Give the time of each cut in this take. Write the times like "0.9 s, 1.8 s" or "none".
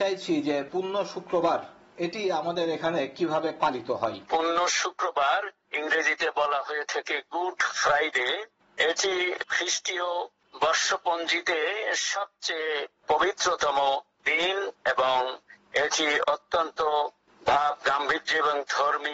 4.3 s